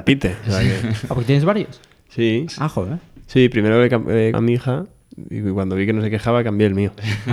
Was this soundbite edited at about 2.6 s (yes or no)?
no